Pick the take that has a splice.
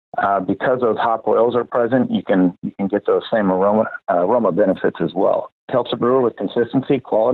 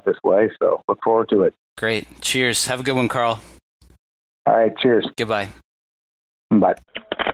first; 1 cut; at 5.7 s

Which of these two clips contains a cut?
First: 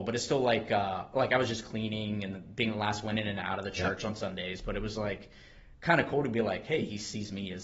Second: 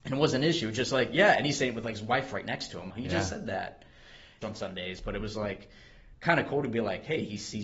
second; 2 cuts; at 2.9 s, 4.4 s

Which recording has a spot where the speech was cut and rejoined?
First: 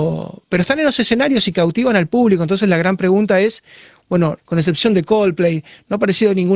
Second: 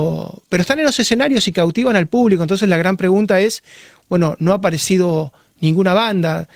first; 1 cut; at 4.4 s

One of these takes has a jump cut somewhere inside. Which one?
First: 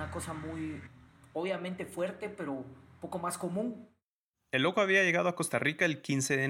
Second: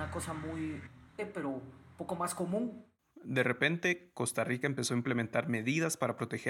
second; 2 cuts; at 1.2 s, 3.0 s

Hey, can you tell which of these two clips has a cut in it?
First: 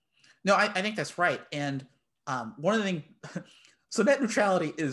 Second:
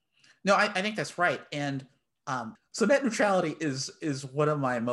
second; 1 cut; at 2.6 s

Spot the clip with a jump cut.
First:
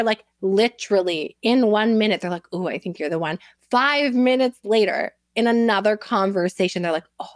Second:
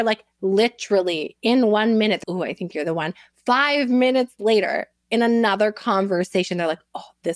second; 1 cut; at 2.2 s

